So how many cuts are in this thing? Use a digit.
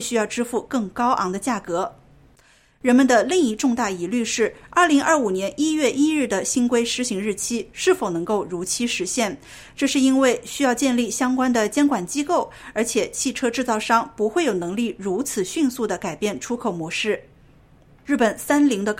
0